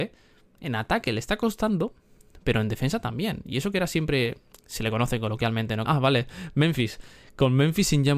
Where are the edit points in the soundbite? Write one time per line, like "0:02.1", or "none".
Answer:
0:04.5
0:05.9